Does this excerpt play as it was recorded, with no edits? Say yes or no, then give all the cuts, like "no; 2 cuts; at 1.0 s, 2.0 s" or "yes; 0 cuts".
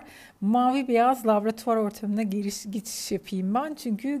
yes; 0 cuts